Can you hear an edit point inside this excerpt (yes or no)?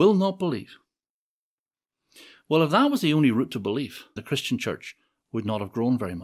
yes